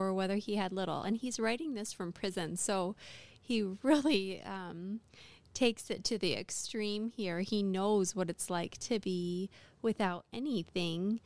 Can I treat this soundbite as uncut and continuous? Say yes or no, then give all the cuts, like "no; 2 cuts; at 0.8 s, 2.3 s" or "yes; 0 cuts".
yes; 0 cuts